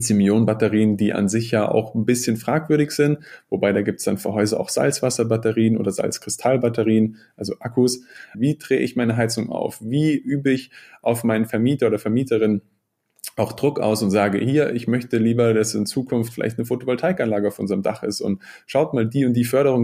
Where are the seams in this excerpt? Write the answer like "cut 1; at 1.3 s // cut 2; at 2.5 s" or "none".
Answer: cut 1; at 8.3 s